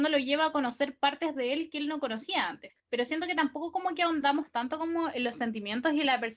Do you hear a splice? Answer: no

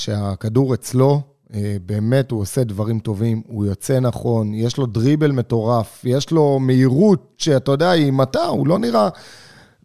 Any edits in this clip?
no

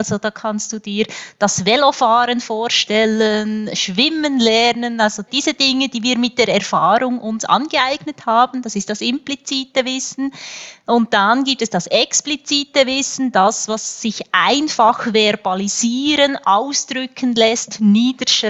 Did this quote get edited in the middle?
yes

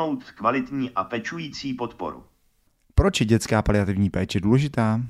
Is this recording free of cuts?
yes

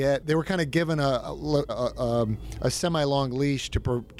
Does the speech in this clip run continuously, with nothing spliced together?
no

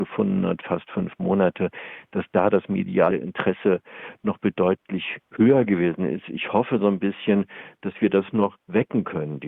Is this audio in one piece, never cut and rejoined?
yes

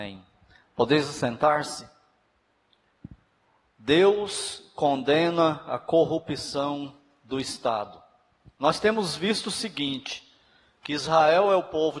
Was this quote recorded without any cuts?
yes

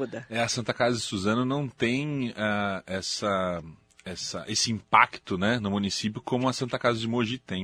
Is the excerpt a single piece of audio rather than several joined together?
yes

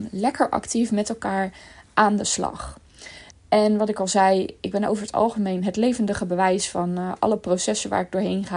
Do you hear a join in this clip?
yes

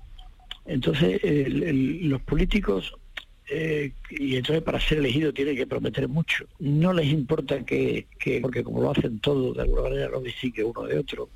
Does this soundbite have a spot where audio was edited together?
yes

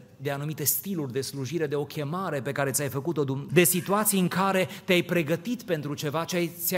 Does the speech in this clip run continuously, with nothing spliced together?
no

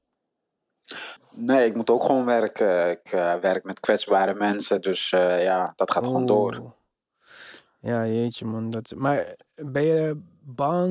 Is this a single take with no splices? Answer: no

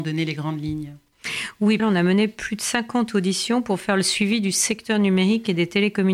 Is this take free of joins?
no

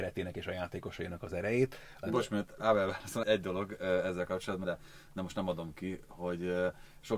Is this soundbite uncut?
no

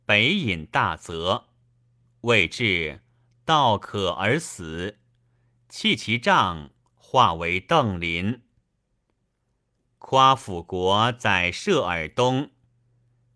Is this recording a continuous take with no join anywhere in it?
yes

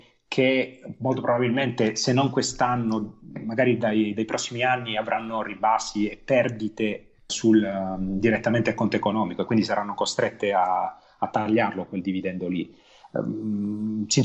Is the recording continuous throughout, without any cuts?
no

